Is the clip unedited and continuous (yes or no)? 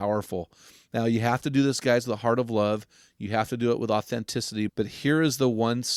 no